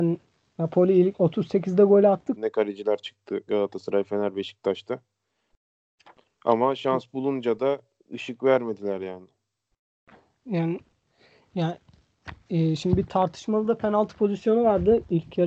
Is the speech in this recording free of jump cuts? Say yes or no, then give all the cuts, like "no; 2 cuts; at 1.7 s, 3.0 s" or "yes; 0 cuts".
no; 1 cut; at 2.4 s